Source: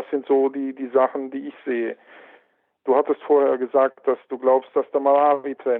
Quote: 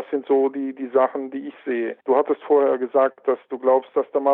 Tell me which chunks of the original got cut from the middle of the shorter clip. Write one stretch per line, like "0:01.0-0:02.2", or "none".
0:02.0-0:02.8